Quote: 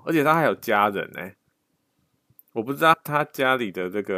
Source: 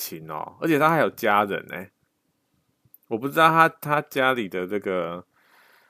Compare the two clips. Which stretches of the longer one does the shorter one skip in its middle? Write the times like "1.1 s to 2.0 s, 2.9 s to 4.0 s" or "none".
3.5 s to 3.7 s